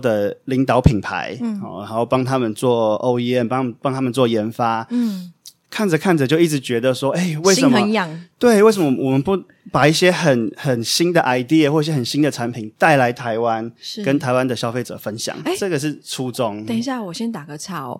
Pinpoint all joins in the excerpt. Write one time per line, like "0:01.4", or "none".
none

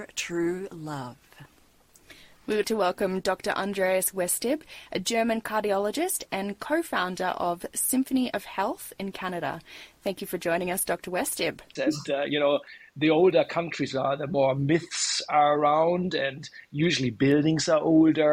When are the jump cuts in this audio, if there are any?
0:02.6
0:11.8

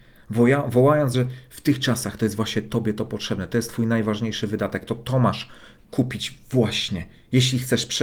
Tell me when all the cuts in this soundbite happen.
none

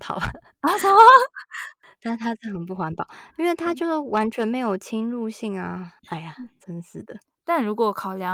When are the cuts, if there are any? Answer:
0:06.0
0:07.4

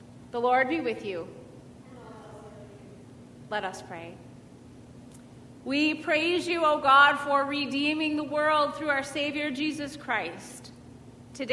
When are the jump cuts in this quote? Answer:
none

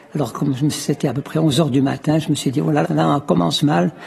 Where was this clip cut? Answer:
0:02.8

